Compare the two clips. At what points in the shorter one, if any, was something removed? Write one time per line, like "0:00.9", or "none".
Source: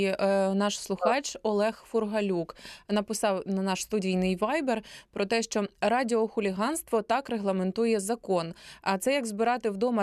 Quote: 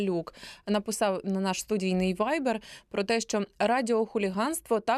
none